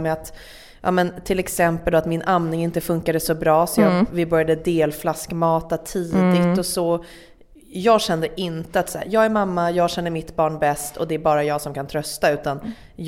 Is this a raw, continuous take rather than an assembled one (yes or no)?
yes